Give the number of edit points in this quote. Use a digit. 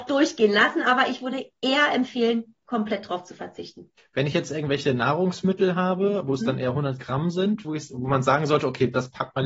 2